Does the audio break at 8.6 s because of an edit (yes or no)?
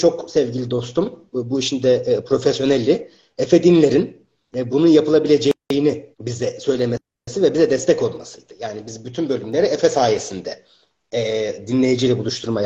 no